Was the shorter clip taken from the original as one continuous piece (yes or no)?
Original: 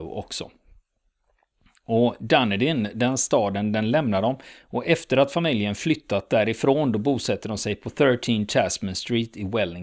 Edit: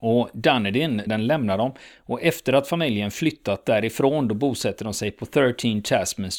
no